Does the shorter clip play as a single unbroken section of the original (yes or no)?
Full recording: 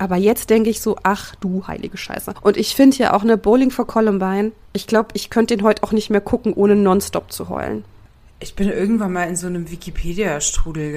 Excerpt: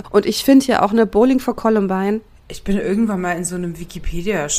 no